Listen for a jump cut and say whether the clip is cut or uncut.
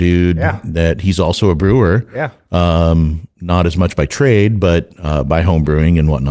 uncut